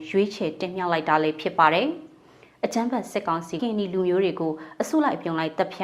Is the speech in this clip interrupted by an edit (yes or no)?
yes